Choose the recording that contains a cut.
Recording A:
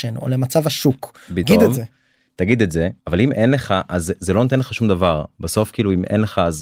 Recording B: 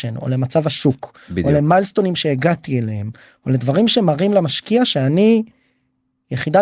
A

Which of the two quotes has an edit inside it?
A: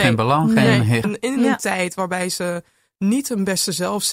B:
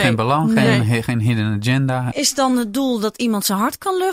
A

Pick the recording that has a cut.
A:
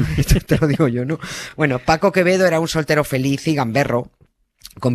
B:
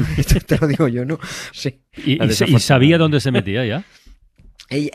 B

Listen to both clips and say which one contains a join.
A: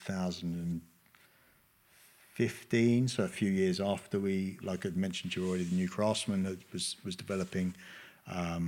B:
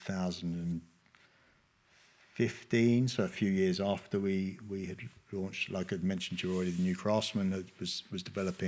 A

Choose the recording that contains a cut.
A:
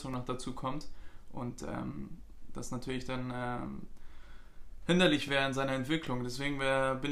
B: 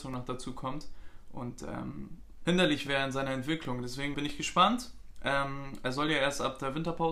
B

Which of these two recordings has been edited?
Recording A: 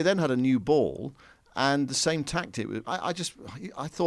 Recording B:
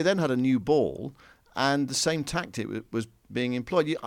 A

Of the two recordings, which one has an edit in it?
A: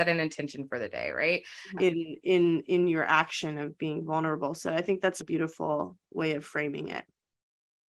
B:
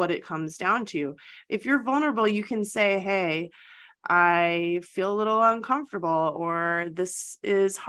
A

